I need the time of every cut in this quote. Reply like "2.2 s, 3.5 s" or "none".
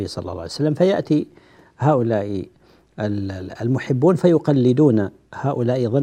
none